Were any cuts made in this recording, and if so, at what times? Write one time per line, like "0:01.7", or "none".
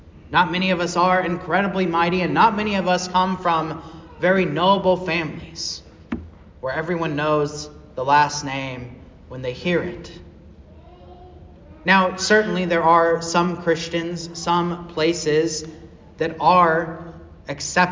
none